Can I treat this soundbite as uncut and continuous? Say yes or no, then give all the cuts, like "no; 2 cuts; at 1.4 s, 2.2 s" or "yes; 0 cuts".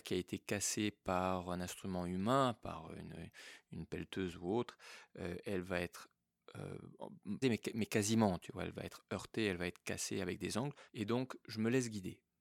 no; 2 cuts; at 7.4 s, 10.9 s